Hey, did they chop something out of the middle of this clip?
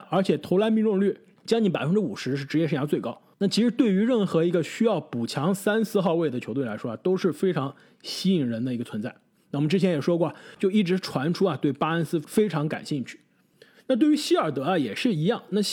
yes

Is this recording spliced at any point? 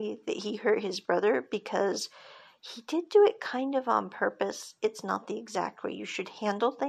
no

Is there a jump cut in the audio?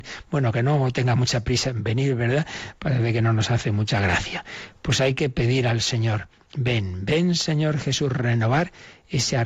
no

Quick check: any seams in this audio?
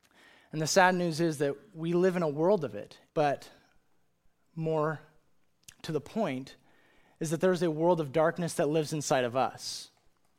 yes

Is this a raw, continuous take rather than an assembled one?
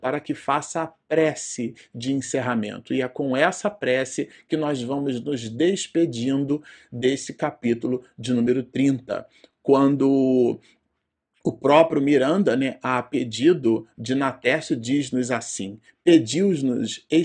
yes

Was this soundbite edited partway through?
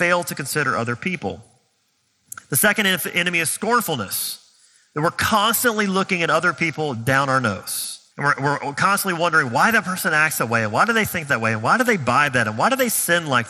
yes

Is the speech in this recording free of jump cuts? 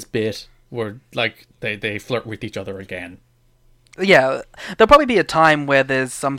yes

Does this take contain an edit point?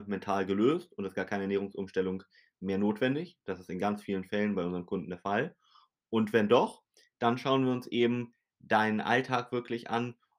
no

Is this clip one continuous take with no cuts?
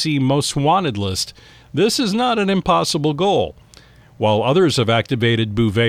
yes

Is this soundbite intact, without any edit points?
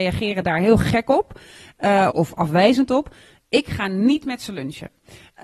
no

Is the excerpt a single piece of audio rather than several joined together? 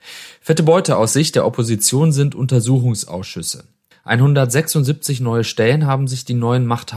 no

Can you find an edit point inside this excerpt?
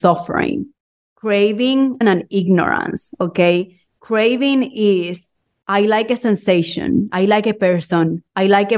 yes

